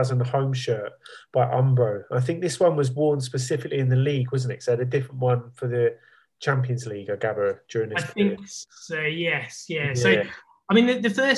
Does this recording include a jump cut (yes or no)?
no